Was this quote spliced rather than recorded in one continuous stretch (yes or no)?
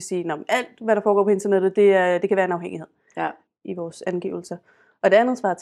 yes